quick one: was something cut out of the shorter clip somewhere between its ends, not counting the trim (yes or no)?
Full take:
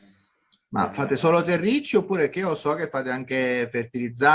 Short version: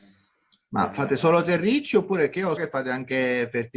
yes